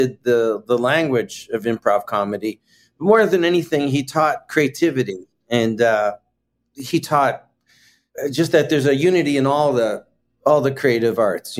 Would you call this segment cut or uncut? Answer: uncut